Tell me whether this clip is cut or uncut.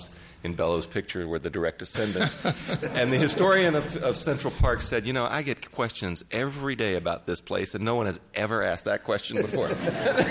uncut